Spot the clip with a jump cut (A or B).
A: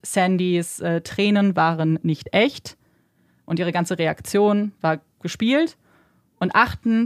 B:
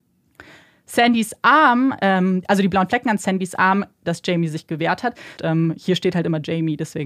B